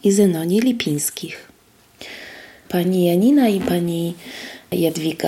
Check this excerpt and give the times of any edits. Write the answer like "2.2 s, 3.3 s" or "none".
2.6 s